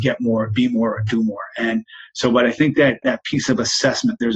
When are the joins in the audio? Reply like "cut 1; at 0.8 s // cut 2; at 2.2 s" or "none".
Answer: cut 1; at 3.0 s